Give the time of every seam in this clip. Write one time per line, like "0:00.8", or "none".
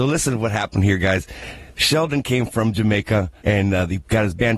0:03.4